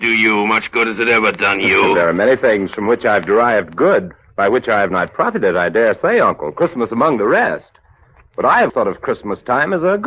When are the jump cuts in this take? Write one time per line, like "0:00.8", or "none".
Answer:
0:08.7